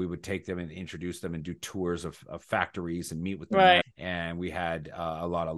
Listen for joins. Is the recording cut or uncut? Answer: cut